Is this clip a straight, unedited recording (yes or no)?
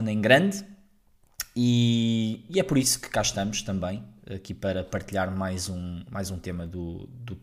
yes